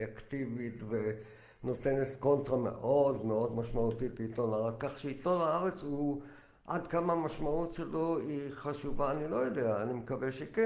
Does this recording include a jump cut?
no; 0 cuts

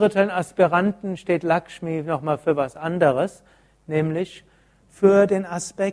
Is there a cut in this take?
no; 0 cuts

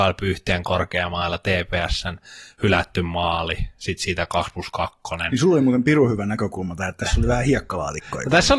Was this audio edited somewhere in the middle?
no; 0 cuts

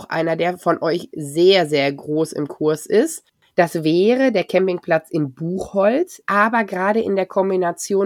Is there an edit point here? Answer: yes; 2 cuts; at 3.5 s, 6.2 s

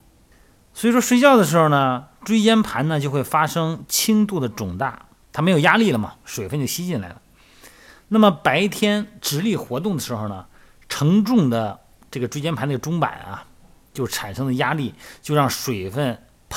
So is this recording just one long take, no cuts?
yes; 0 cuts

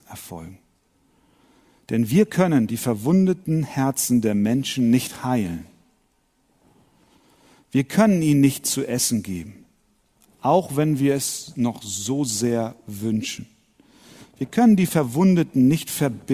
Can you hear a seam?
no; 0 cuts

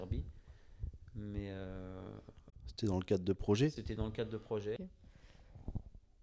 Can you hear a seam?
yes; 1 cut; at 4.8 s

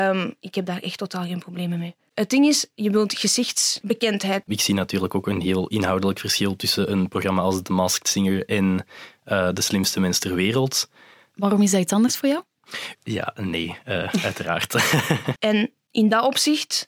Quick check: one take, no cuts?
no; 3 cuts; at 4.4 s, 12.9 s, 15.4 s

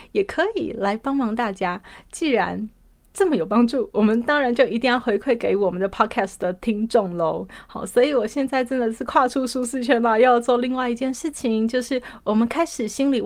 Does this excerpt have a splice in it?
no; 0 cuts

